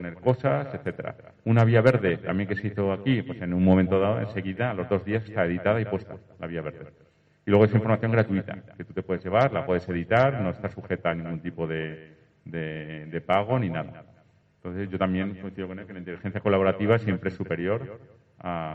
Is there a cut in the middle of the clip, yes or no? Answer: no